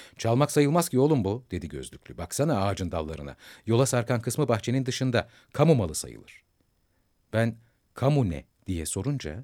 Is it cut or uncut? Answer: uncut